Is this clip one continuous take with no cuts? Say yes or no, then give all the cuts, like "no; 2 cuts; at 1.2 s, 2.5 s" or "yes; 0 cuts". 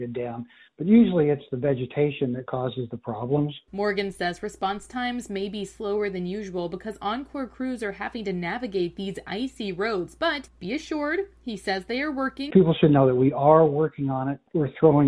no; 1 cut; at 12.5 s